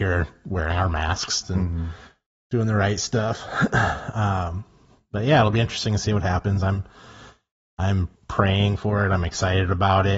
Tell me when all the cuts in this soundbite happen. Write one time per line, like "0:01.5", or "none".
0:01.4
0:08.2